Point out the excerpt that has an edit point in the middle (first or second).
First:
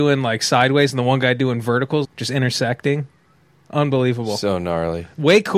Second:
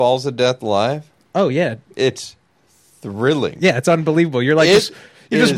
first